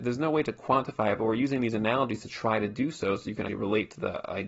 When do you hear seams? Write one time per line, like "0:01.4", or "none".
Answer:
0:03.5